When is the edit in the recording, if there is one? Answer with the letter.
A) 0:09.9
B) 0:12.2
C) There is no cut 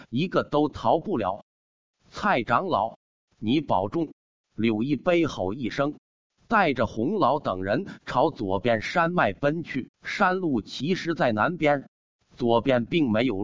A